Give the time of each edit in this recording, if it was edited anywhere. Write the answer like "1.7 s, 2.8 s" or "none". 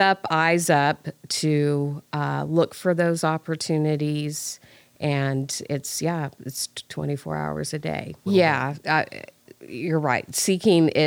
6.9 s, 8.3 s